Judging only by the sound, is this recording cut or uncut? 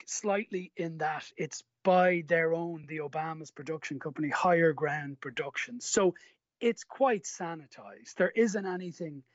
uncut